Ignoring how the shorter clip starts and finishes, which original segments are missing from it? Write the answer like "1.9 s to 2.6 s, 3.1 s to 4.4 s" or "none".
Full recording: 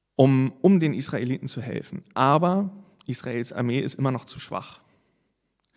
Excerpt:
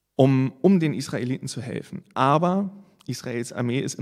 none